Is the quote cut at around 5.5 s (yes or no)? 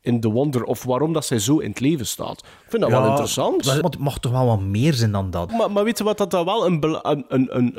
yes